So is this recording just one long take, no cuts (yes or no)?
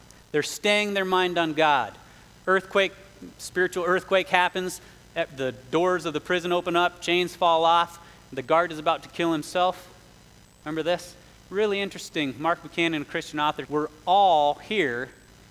no